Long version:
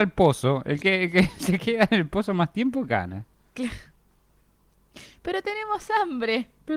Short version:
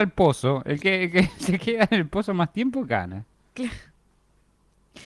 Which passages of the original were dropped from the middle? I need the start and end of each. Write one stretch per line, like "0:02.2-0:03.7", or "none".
none